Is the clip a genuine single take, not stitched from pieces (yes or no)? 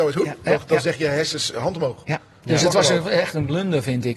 no